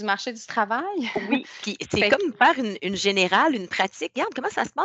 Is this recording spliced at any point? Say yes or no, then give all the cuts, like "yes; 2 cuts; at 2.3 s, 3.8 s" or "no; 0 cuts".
no; 0 cuts